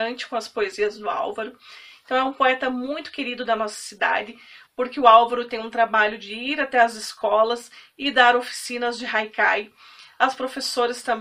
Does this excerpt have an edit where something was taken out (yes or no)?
yes